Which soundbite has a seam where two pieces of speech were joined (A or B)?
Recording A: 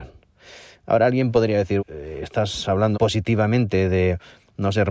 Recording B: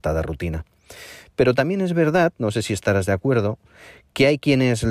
A